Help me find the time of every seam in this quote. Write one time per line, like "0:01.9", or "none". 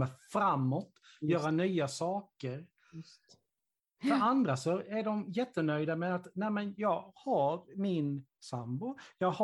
none